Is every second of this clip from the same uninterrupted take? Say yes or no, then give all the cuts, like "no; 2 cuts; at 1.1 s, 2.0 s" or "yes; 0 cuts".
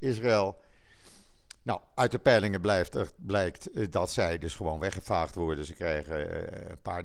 yes; 0 cuts